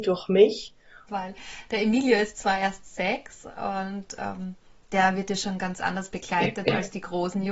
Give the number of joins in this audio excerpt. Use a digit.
1